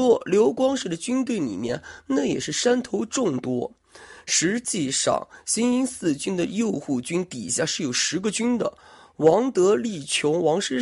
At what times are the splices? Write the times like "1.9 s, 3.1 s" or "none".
none